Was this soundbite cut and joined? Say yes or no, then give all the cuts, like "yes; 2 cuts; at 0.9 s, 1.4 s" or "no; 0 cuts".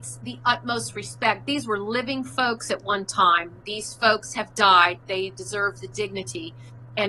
no; 0 cuts